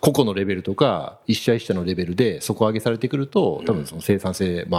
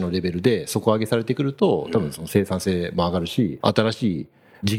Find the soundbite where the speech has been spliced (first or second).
second